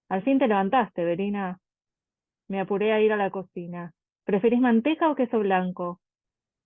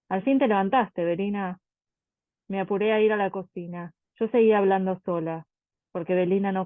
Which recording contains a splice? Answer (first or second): second